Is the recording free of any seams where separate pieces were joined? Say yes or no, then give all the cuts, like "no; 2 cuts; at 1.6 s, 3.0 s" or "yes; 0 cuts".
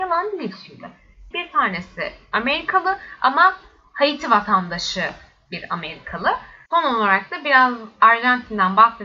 no; 2 cuts; at 1.3 s, 6.7 s